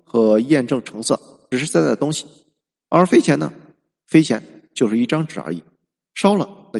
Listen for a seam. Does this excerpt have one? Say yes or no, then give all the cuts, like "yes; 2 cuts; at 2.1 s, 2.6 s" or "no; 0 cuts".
yes; 1 cut; at 1.5 s